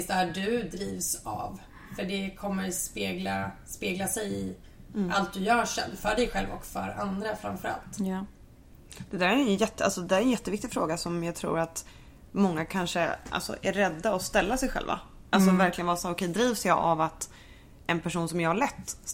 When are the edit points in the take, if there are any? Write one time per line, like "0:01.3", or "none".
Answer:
none